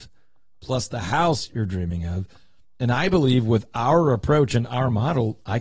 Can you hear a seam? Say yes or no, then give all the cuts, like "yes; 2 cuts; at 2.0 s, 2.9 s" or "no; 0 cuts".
no; 0 cuts